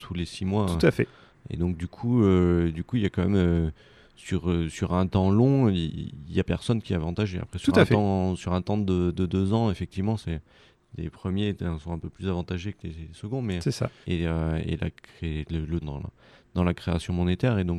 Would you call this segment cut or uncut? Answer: cut